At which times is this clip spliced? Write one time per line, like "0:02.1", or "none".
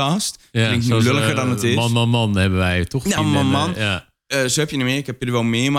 0:03.2